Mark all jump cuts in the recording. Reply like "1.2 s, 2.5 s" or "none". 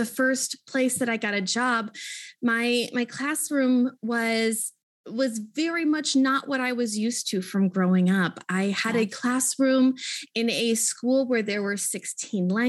none